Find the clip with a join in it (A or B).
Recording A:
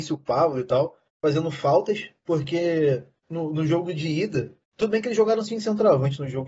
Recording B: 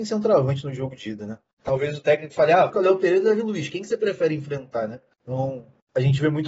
B